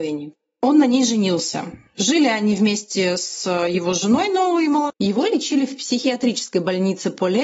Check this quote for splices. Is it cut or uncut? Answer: cut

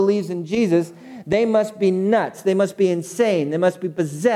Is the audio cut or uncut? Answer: uncut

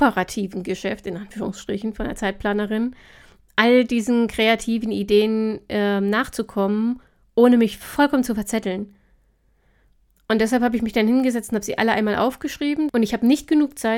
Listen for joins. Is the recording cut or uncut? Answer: cut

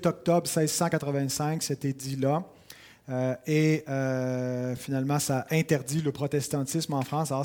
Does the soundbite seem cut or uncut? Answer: uncut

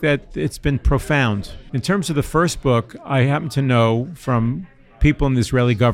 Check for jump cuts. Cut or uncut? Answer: uncut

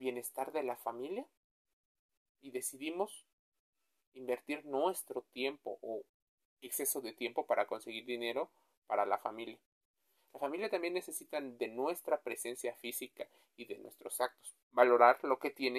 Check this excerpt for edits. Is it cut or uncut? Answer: cut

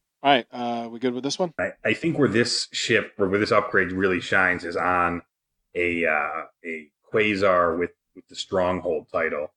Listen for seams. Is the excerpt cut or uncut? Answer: cut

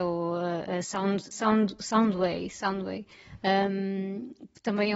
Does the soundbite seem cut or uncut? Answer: cut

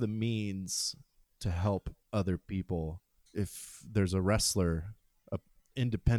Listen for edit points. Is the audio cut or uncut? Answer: cut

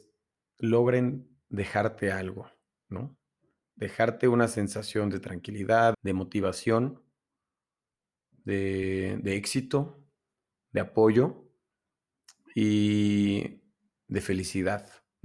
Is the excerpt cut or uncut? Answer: cut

